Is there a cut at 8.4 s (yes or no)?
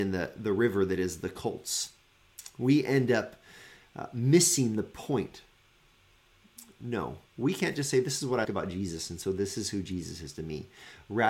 yes